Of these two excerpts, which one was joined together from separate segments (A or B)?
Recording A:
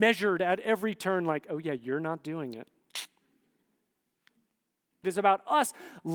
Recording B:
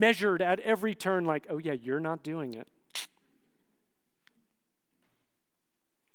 A